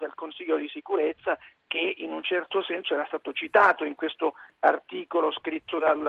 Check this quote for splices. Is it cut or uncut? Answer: uncut